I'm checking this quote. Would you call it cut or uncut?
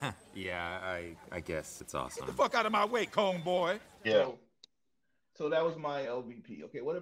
cut